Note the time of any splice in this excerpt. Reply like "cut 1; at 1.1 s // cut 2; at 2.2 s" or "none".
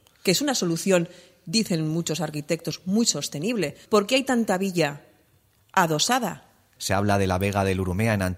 cut 1; at 3.9 s // cut 2; at 6.8 s